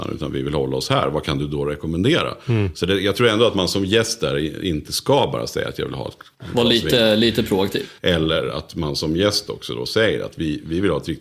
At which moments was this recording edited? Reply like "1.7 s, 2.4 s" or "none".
8.0 s